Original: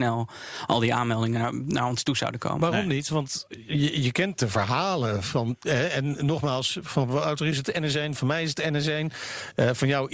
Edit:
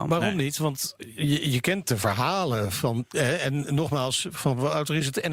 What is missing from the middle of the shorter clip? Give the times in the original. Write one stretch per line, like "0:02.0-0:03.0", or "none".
none